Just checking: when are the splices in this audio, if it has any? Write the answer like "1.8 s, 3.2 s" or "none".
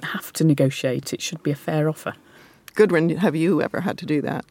none